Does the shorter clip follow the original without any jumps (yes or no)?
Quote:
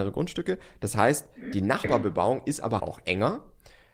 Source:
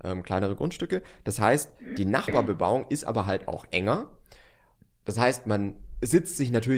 no